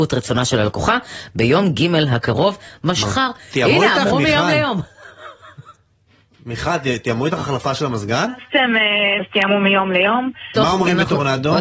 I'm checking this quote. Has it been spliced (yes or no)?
yes